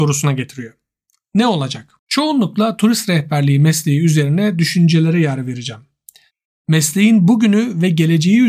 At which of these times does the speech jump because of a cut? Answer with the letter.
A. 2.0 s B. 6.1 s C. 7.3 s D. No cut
A